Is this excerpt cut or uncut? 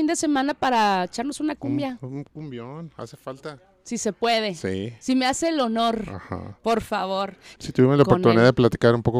cut